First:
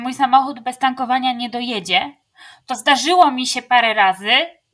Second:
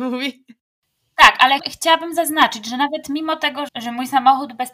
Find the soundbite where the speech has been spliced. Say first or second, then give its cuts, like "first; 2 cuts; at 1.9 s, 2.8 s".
second; 2 cuts; at 1.6 s, 3.7 s